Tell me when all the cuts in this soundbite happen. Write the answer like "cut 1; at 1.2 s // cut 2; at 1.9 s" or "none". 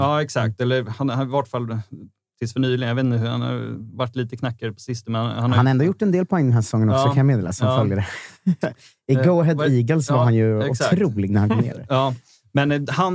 none